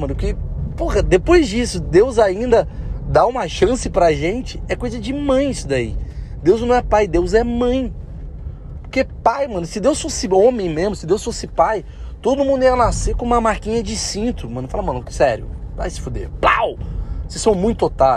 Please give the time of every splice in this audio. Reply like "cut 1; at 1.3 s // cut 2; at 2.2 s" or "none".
none